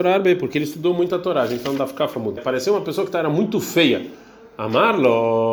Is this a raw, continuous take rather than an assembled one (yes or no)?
no